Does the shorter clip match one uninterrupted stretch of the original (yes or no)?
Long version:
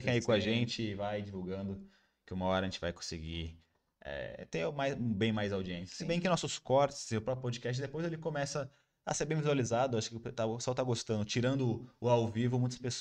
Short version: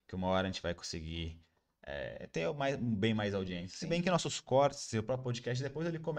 yes